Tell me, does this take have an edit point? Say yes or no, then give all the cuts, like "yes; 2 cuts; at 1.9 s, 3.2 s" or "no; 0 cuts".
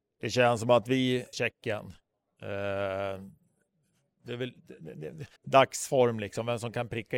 yes; 2 cuts; at 1.3 s, 5.4 s